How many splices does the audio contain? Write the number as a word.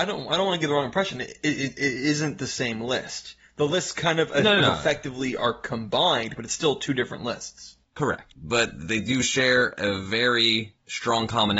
zero